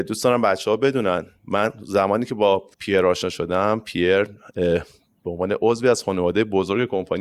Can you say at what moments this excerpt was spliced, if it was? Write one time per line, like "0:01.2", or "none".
0:02.7